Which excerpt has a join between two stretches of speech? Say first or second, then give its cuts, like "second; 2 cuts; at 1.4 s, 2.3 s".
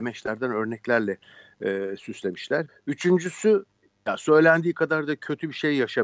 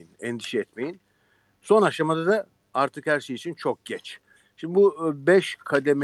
first; 1 cut; at 2.7 s